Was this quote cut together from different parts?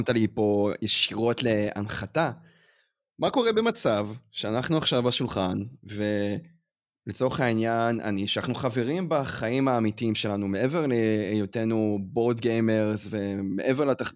no; 0 cuts

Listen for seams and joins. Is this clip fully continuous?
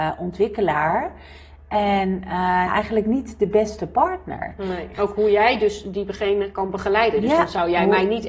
no; 2 cuts; at 2.7 s, 4.9 s

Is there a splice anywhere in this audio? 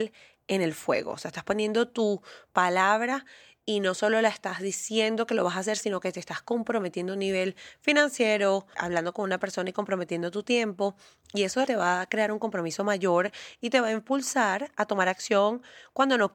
yes; 2 cuts; at 8.7 s, 11.6 s

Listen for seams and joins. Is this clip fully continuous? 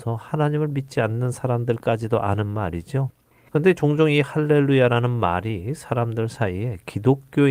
yes; 0 cuts

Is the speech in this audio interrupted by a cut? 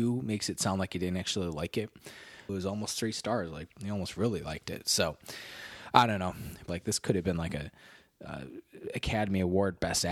yes; 2 cuts; at 2.5 s, 6.7 s

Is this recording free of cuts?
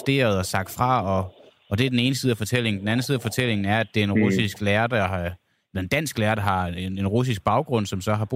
yes; 0 cuts

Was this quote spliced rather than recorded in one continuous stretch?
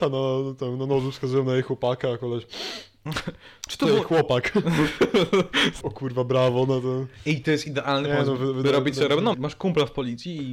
yes; 2 cuts; at 5.8 s, 9.3 s

